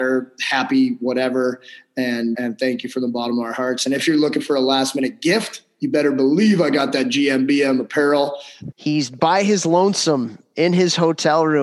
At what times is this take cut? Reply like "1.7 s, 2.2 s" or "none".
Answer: 2.3 s, 8.7 s